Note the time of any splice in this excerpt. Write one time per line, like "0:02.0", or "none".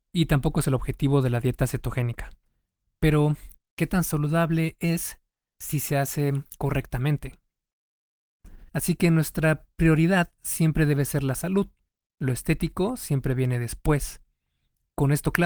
0:03.6
0:08.7

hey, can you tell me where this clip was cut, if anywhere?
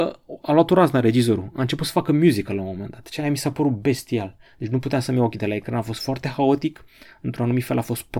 none

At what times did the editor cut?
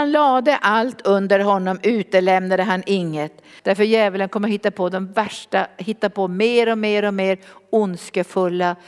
0:03.6

